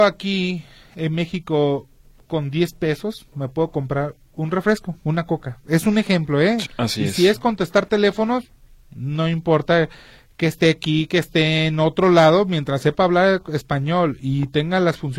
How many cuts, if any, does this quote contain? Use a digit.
1